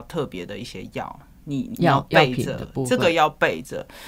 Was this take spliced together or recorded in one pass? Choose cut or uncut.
cut